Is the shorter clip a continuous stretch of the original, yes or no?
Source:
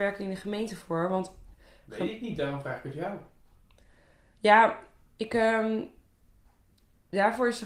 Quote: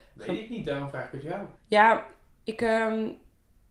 no